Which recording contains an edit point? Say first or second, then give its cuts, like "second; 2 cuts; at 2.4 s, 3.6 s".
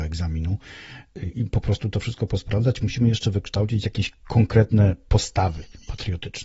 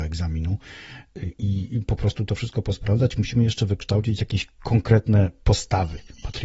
first; 1 cut; at 1.3 s